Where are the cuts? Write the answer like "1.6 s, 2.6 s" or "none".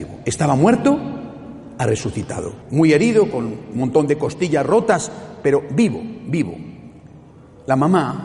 2.6 s